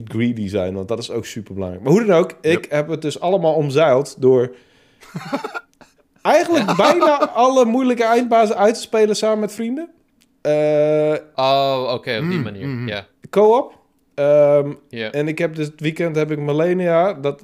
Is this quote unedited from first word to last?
yes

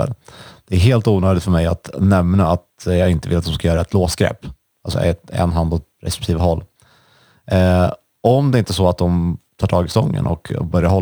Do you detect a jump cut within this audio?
yes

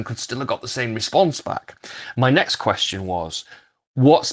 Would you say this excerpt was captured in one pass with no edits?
no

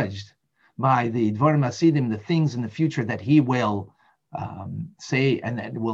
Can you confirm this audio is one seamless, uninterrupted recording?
yes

